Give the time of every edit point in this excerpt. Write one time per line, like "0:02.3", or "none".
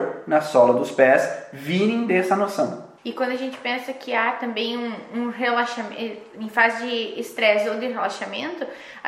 0:03.0